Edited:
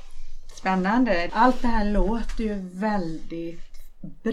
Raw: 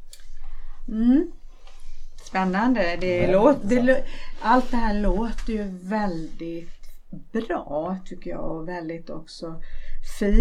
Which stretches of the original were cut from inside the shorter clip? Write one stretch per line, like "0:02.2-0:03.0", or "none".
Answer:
0:03.0-0:04.4